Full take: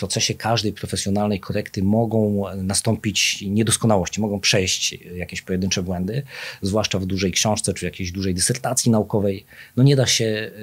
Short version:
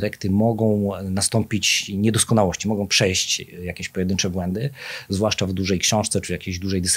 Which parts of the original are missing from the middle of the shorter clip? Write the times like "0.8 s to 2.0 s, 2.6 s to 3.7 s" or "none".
none